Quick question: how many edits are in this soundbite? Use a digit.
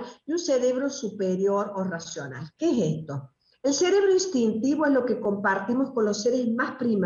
0